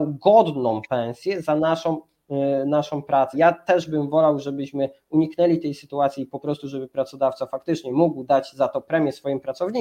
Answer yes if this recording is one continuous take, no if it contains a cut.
no